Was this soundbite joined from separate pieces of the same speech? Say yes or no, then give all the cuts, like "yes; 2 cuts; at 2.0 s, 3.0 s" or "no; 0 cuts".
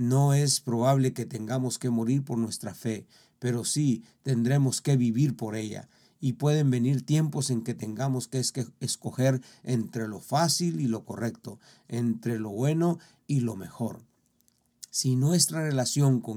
no; 0 cuts